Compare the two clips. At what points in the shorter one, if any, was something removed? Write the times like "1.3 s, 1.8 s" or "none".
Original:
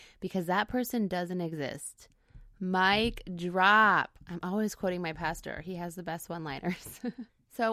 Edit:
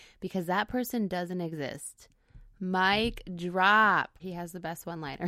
4.2 s